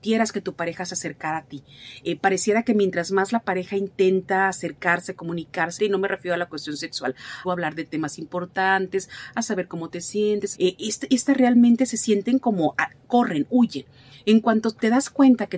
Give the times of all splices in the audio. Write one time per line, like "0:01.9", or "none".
0:05.8
0:07.4
0:10.5